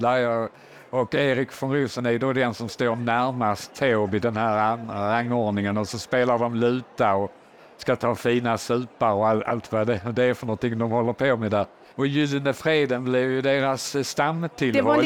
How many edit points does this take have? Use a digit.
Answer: 1